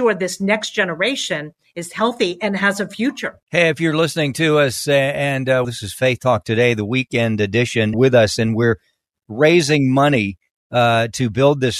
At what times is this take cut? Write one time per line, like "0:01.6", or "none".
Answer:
0:03.4
0:05.6
0:07.9